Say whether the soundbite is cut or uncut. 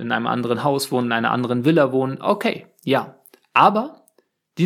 uncut